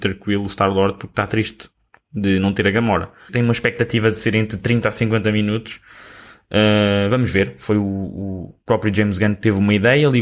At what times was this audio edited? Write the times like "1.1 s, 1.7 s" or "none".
3.3 s